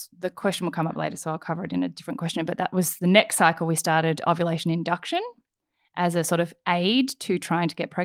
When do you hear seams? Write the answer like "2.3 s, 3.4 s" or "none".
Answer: none